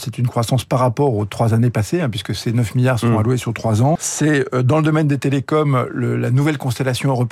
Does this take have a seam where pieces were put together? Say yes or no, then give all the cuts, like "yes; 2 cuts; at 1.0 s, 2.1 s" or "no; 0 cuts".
yes; 1 cut; at 4.0 s